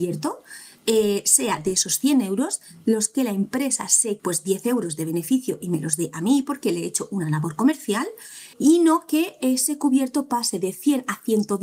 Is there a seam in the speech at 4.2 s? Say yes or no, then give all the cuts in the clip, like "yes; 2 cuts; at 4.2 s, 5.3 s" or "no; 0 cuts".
yes; 2 cuts; at 4.2 s, 8.5 s